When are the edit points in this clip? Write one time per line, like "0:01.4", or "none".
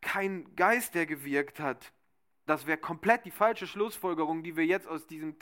0:02.5